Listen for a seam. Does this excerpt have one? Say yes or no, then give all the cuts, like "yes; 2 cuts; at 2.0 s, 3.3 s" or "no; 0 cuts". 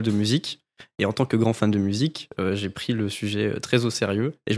no; 0 cuts